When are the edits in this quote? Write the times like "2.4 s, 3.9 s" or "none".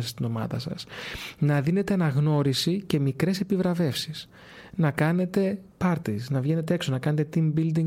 5.7 s